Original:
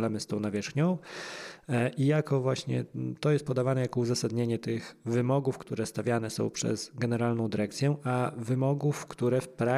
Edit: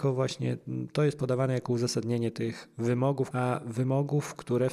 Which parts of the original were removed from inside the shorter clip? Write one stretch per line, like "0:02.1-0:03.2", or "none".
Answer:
0:05.6-0:08.0

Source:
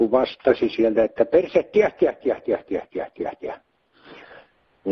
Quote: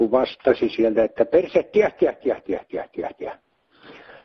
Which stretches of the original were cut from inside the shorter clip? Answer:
0:02.4-0:02.6

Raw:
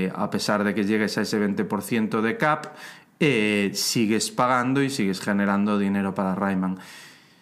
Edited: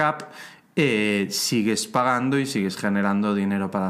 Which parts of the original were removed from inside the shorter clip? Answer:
none

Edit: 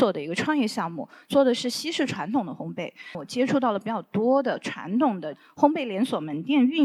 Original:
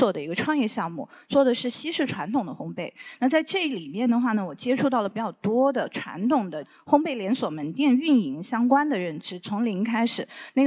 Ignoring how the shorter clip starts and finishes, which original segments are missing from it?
0:03.1-0:04.4

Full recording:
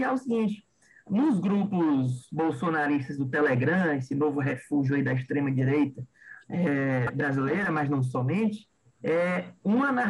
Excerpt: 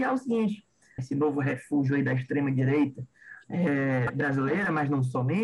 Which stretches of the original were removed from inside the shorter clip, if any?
0:01.0-0:04.0

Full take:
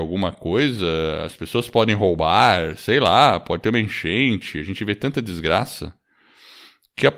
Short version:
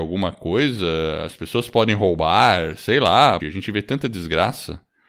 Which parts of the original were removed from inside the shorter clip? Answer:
0:03.4-0:04.5

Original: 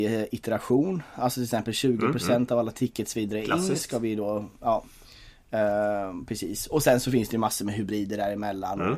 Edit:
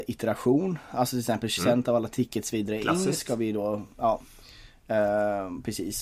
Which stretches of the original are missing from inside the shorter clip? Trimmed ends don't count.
0:01.8-0:02.2

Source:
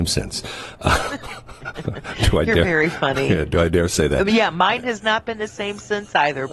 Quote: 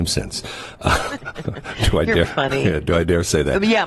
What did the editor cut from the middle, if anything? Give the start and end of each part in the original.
0:01.2-0:01.6
0:02.6-0:02.9

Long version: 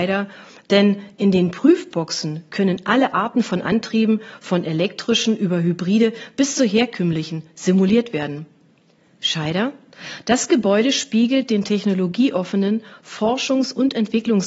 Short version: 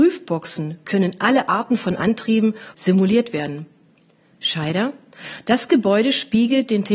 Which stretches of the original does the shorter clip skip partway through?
0:04.4-0:07.5

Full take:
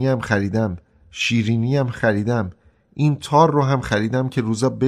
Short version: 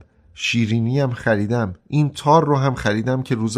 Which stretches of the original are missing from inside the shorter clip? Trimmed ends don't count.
0:02.6-0:02.8

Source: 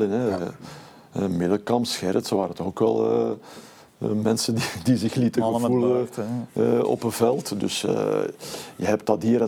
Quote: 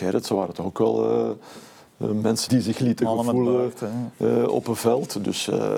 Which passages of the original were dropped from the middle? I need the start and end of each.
0:04.5-0:04.8

